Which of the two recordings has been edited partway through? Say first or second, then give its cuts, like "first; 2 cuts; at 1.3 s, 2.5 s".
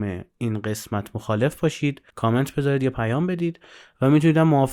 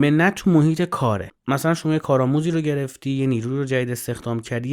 first; 1 cut; at 2.1 s